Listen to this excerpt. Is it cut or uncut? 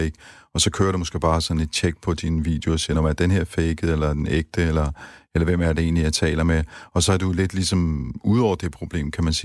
uncut